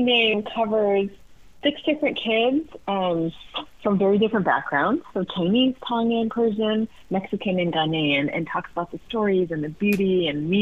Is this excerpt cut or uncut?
cut